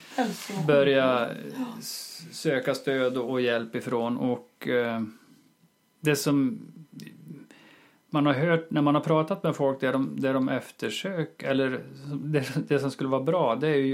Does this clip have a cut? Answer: no; 0 cuts

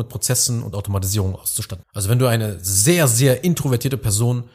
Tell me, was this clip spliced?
yes; 1 cut; at 1.8 s

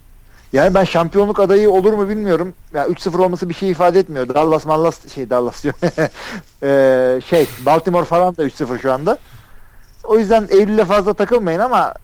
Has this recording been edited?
no; 0 cuts

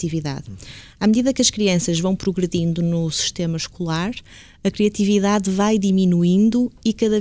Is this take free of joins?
yes; 0 cuts

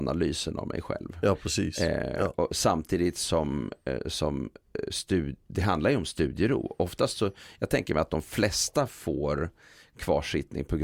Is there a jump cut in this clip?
no; 0 cuts

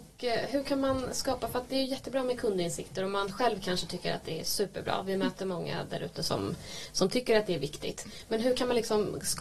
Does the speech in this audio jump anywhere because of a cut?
no; 0 cuts

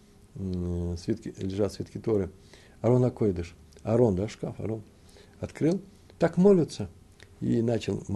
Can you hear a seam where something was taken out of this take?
no; 0 cuts

